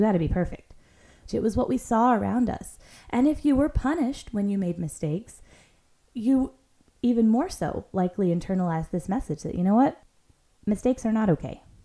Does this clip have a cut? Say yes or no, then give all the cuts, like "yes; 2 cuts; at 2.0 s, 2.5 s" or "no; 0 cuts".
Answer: yes; 1 cut; at 1.3 s